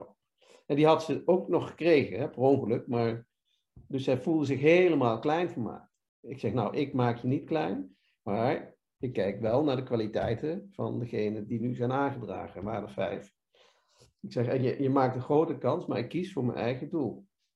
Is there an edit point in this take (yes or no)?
no